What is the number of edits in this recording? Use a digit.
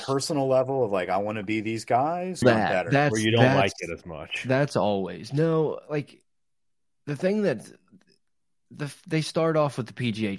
1